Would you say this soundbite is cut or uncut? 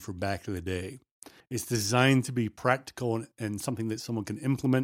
cut